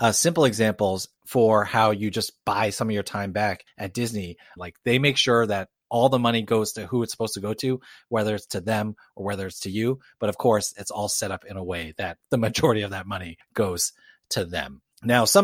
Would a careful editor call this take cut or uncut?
cut